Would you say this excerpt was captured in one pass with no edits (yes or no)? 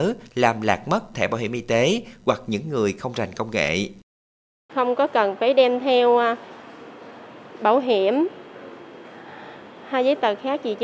no